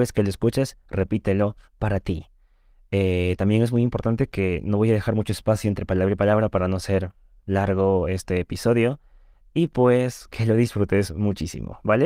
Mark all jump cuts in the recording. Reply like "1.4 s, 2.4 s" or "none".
none